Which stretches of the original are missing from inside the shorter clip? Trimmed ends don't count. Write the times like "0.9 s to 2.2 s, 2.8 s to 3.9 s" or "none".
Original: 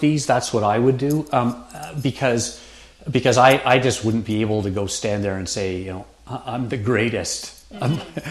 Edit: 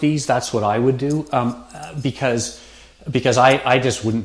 none